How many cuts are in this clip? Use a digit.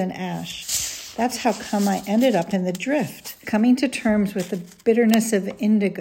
1